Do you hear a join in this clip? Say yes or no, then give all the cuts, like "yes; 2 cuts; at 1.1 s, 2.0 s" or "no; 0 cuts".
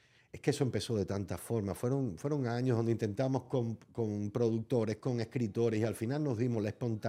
no; 0 cuts